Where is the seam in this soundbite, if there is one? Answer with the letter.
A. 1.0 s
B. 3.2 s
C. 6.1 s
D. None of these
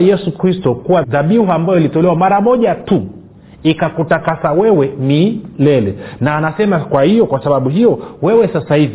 A